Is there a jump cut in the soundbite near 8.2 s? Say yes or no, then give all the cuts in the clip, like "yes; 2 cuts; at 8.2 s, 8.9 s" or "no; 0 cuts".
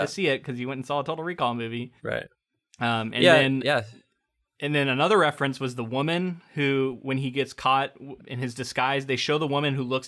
yes; 2 cuts; at 2.0 s, 8.2 s